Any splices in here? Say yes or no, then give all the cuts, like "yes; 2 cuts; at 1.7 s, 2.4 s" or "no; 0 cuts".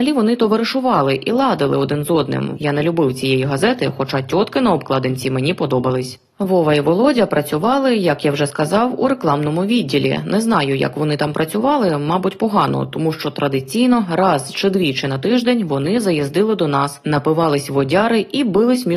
yes; 1 cut; at 2.6 s